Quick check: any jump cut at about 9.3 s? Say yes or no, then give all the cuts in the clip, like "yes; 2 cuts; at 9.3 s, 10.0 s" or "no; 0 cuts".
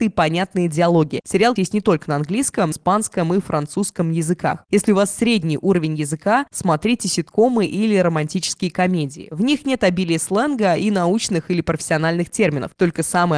no; 2 cuts; at 1.6 s, 2.7 s